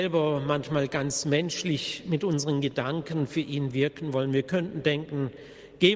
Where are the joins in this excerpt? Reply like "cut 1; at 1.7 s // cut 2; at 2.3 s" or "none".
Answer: none